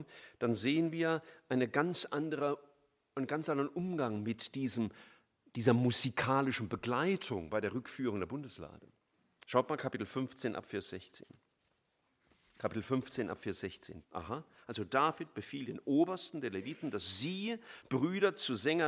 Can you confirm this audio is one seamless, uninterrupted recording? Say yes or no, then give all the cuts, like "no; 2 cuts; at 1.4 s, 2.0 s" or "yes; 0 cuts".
no; 1 cut; at 14.0 s